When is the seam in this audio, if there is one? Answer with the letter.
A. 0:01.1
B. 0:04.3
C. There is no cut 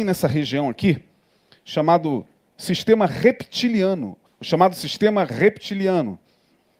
B